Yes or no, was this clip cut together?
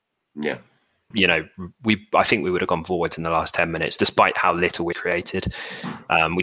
yes